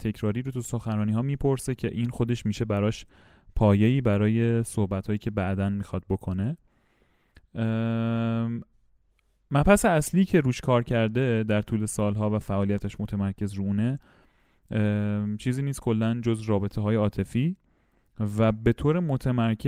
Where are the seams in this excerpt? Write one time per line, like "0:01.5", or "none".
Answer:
none